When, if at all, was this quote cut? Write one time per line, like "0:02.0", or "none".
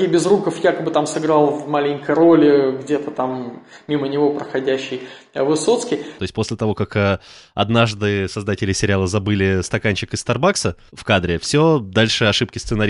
0:06.2